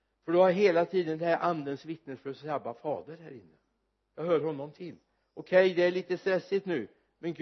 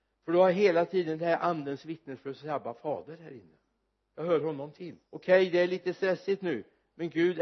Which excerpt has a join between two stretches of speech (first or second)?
second